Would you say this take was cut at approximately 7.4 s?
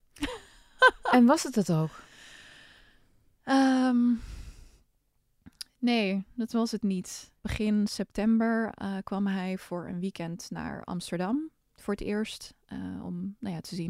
yes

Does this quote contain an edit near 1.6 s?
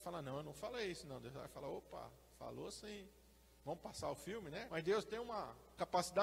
no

